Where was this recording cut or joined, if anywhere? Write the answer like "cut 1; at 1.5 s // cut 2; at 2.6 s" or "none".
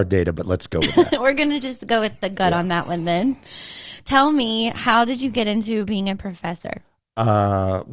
none